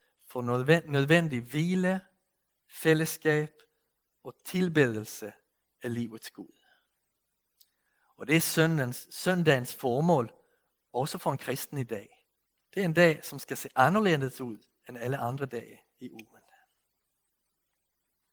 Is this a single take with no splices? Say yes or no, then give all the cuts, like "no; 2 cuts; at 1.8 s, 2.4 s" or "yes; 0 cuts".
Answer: no; 1 cut; at 12.6 s